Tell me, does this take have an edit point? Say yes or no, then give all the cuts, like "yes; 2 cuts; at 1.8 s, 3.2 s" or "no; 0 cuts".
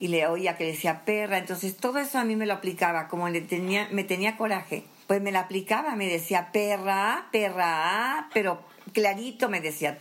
no; 0 cuts